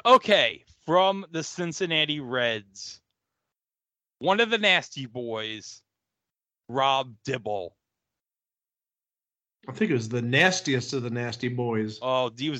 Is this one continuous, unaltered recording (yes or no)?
yes